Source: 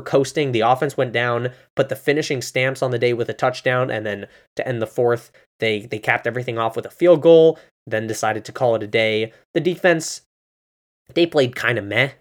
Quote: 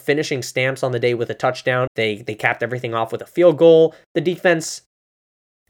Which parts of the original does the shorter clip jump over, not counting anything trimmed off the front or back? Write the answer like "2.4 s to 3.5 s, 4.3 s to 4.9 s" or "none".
3.9 s to 5.5 s, 7.7 s to 9.4 s

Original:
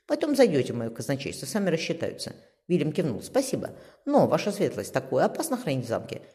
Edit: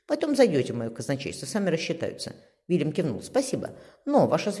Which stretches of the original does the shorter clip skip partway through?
none

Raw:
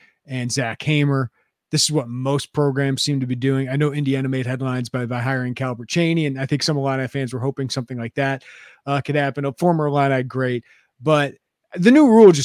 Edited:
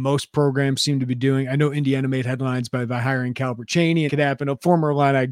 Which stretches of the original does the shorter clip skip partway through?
6.3 s to 9.0 s

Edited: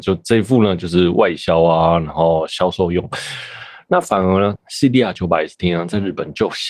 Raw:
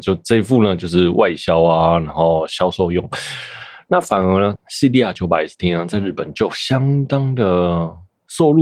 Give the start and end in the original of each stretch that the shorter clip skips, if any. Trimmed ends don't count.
none

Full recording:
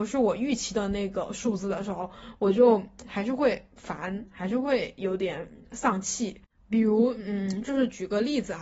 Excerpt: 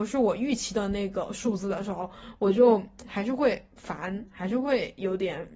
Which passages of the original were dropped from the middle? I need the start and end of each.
none

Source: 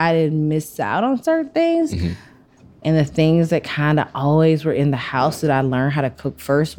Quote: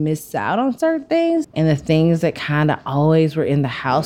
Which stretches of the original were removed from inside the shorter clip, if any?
1.9 s to 2.7 s

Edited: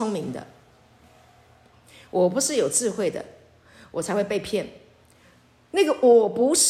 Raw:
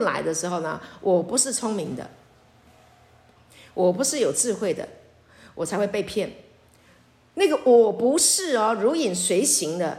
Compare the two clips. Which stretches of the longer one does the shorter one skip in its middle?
none

